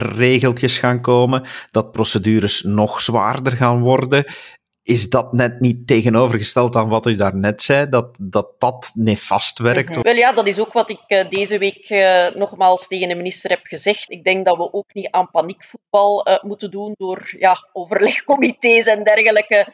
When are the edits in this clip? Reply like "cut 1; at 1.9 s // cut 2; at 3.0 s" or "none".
cut 1; at 10.0 s // cut 2; at 14.1 s